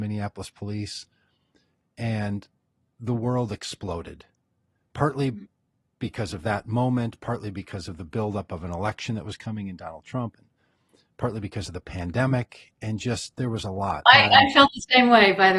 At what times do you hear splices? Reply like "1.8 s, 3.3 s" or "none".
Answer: 14.1 s